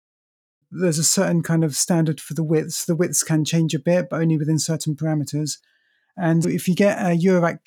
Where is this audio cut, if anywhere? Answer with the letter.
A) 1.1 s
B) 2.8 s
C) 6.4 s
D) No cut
C